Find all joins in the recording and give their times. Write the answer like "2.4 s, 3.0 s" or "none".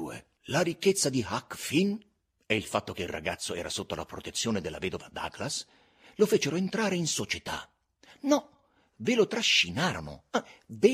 none